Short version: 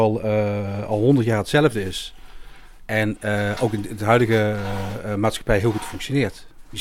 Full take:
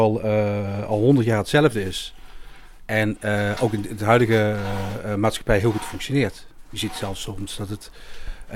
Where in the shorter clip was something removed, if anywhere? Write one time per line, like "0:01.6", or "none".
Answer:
none